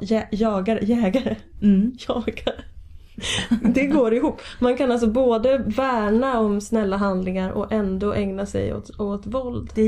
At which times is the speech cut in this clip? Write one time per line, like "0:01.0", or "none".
none